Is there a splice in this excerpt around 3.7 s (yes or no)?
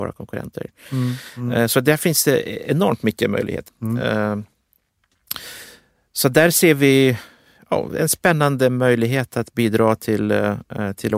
yes